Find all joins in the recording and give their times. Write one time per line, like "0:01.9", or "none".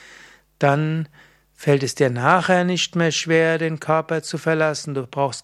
none